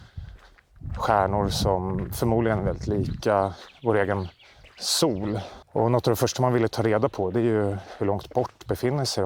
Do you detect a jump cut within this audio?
yes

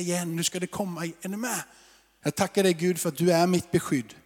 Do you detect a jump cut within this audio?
yes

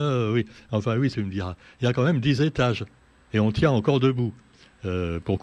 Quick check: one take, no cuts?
no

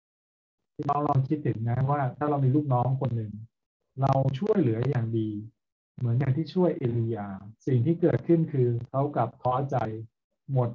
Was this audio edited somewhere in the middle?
yes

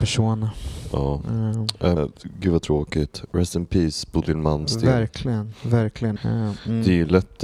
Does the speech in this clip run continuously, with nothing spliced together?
no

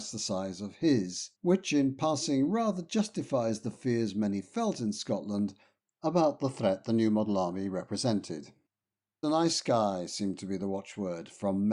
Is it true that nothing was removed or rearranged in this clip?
no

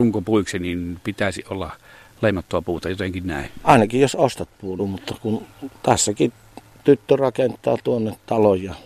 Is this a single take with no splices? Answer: no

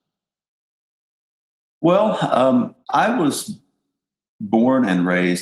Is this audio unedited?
no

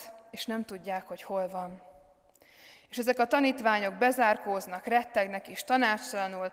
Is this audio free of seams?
yes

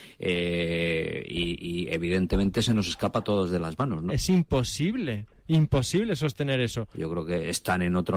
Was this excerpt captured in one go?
no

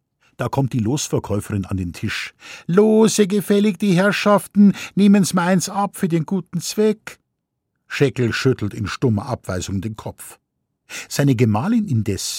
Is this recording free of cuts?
yes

